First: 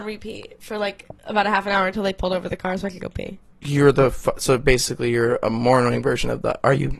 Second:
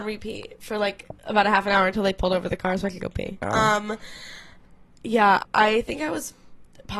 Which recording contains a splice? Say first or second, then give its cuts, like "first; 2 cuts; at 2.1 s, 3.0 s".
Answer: second; 2 cuts; at 3.4 s, 5.4 s